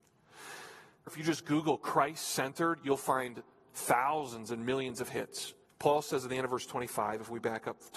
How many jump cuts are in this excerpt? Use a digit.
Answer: 2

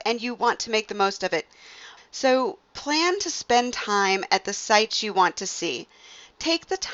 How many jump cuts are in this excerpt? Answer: 1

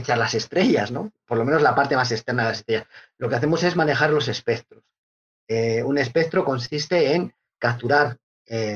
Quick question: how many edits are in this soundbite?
0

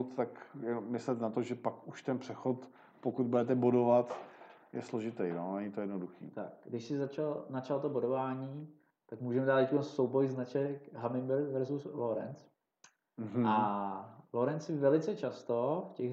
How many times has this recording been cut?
0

